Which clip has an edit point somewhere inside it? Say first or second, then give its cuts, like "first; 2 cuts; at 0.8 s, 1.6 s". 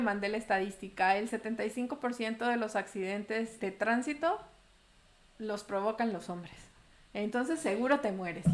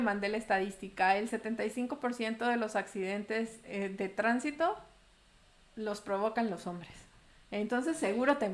first; 1 cut; at 3.6 s